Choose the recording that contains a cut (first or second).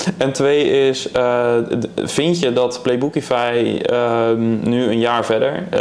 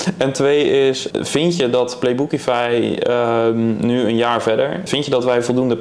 second